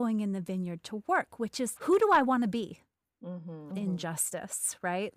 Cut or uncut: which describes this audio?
cut